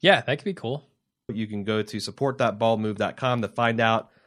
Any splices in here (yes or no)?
yes